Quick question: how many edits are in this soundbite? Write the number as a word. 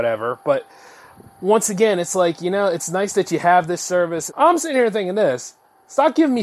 one